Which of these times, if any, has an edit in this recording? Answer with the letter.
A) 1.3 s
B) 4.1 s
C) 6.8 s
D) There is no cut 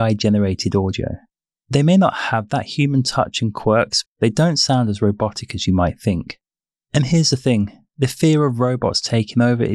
B